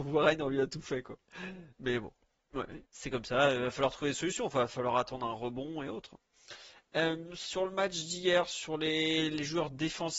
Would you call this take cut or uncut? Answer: uncut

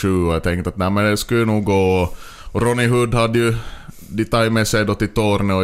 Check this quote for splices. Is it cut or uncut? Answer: uncut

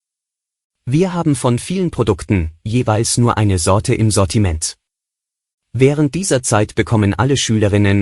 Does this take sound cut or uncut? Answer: cut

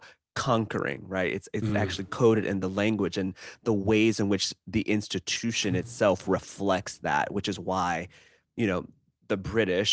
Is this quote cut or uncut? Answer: uncut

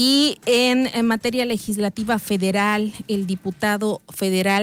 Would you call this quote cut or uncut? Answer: uncut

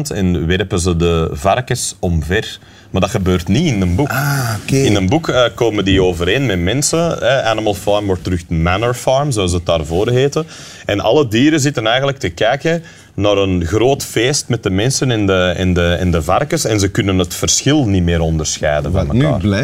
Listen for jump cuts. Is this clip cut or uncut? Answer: uncut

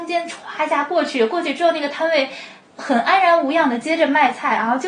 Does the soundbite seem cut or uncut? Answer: uncut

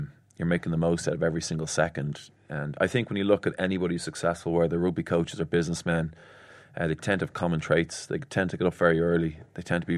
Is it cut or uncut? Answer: uncut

